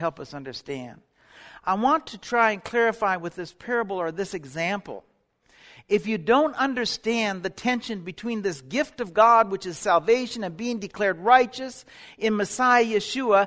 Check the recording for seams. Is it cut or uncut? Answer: uncut